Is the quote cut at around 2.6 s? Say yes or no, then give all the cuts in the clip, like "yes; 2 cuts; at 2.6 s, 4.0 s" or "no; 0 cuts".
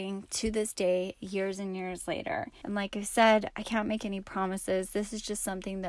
yes; 1 cut; at 2.6 s